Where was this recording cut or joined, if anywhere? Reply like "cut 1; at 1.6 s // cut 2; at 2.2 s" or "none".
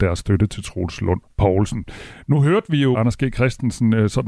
cut 1; at 1.3 s // cut 2; at 2.9 s